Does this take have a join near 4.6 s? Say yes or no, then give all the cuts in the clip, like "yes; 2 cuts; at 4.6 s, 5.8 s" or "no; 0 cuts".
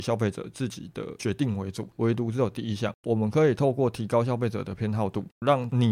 no; 2 cuts; at 1.9 s, 2.9 s